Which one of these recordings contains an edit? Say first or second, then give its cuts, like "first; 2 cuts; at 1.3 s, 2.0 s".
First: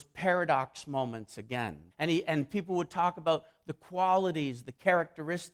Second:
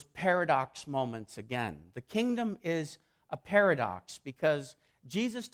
first; 1 cut; at 1.9 s